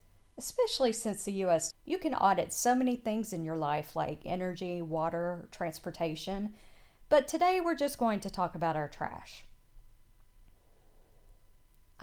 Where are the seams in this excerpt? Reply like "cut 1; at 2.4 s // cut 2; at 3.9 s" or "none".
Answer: cut 1; at 1.7 s